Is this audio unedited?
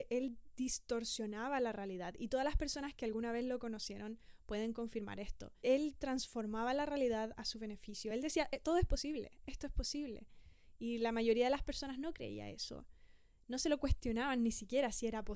yes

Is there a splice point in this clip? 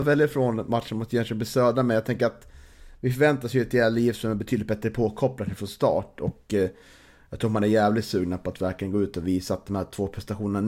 no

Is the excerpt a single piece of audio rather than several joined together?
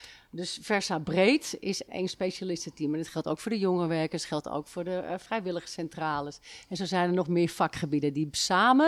no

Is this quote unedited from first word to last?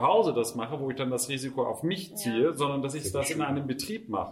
yes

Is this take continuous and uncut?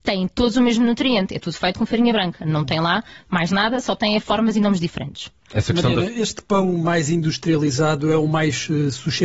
yes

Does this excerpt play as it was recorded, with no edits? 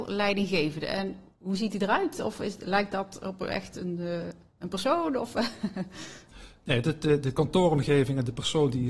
yes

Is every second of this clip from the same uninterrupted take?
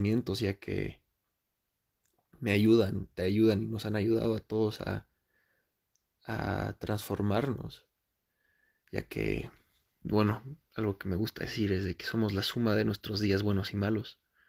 yes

